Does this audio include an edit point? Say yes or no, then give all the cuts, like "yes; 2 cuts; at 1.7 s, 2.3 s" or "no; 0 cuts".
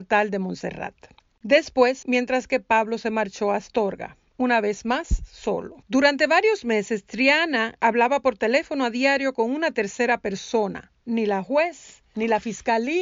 yes; 3 cuts; at 2.0 s, 5.8 s, 11.0 s